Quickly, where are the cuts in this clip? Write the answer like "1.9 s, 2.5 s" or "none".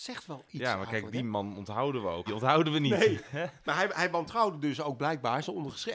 2.3 s